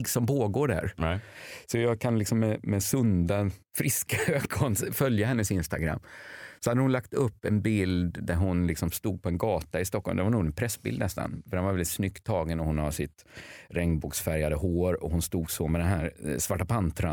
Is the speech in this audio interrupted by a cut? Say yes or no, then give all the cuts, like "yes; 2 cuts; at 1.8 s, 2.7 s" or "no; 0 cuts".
no; 0 cuts